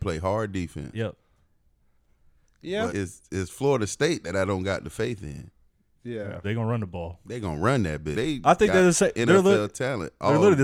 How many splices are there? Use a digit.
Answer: 3